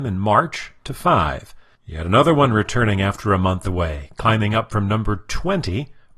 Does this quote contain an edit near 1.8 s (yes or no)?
yes